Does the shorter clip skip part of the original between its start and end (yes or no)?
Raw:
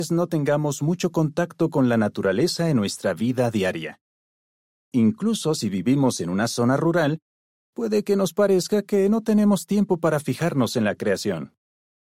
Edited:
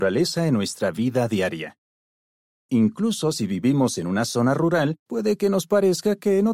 yes